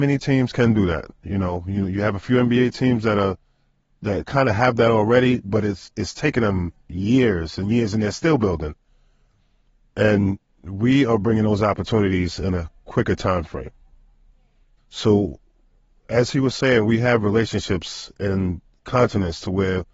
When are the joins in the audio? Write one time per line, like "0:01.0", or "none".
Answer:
0:14.8

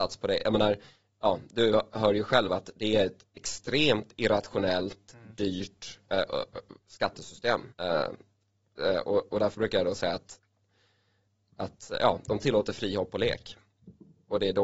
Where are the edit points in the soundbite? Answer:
0:07.7

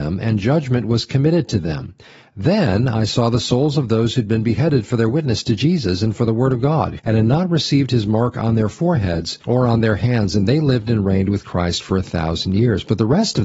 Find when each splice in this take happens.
0:07.0
0:09.4

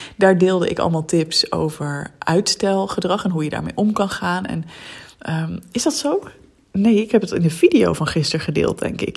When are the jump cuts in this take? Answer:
none

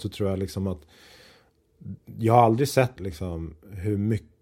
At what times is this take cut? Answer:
0:03.0

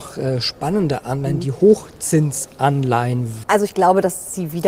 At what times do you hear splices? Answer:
0:03.4

